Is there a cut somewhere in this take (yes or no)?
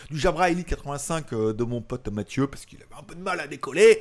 no